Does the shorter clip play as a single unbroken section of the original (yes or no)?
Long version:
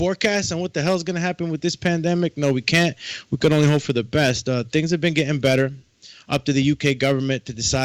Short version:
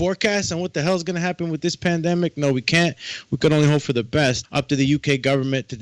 no